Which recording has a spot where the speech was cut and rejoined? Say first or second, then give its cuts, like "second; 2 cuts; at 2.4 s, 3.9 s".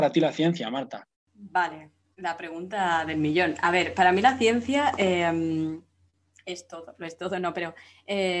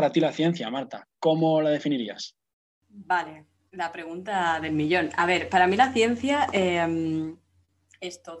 first; 1 cut; at 1.1 s